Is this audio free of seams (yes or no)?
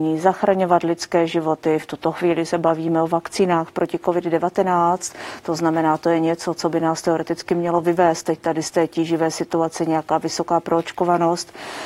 yes